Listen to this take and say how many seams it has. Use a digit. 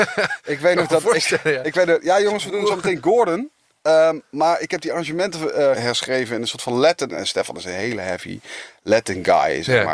2